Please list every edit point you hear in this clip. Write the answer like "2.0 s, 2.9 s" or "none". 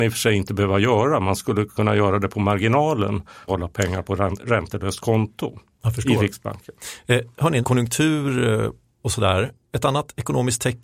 3.5 s, 7.6 s